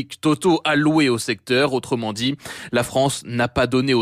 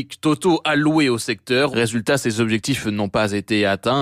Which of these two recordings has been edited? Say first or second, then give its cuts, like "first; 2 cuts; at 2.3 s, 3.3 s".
second; 1 cut; at 1.7 s